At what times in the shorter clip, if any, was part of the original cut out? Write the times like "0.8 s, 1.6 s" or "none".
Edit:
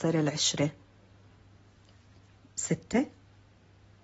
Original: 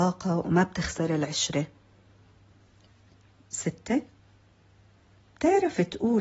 none